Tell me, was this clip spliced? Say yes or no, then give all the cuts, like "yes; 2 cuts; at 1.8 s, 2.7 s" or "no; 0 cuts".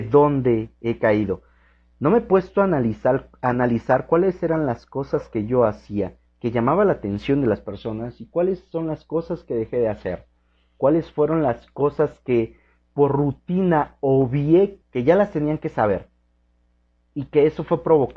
yes; 1 cut; at 14.8 s